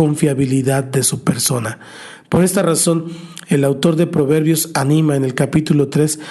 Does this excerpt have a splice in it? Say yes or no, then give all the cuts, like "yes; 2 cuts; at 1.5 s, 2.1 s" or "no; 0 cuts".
no; 0 cuts